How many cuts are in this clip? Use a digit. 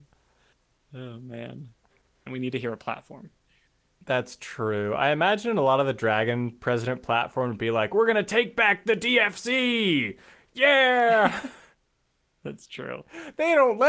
1